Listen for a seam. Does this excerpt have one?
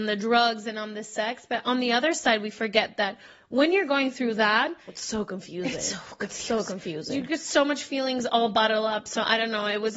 no; 0 cuts

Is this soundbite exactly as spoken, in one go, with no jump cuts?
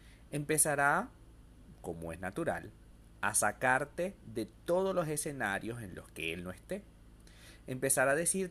yes; 0 cuts

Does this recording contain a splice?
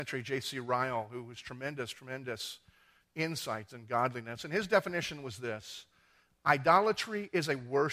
no; 0 cuts

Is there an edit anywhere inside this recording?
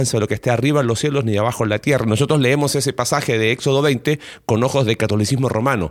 no; 0 cuts

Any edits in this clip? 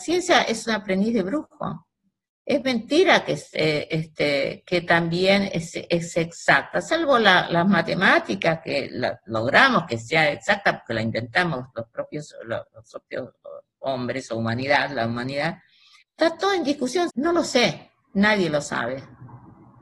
yes; 2 cuts; at 16.0 s, 17.1 s

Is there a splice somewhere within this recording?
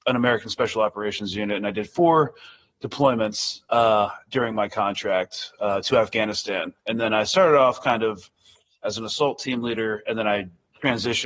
no; 0 cuts

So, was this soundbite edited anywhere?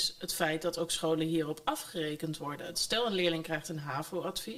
yes; 1 cut; at 2.7 s

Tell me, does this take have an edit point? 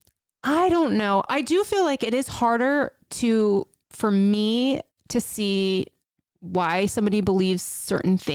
yes; 1 cut; at 1.3 s

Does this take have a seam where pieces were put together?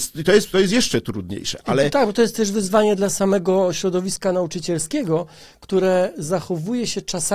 no; 0 cuts

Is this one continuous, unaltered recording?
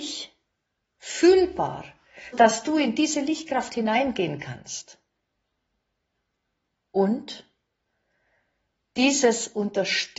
no; 1 cut; at 2.3 s

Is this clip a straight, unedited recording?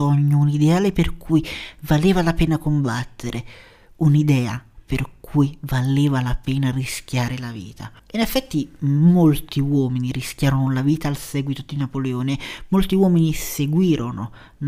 no; 1 cut; at 8.0 s

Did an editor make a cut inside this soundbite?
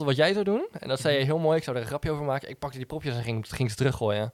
no; 0 cuts

